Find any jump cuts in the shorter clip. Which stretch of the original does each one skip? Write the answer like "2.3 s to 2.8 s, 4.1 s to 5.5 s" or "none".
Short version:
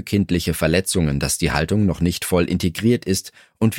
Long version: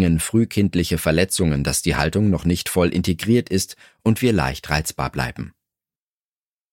none